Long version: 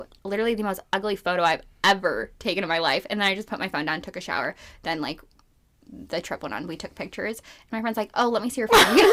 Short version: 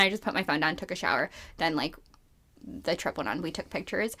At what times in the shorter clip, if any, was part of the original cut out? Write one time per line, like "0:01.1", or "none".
none